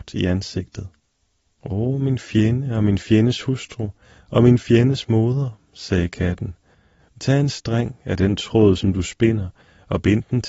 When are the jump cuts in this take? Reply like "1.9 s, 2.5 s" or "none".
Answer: none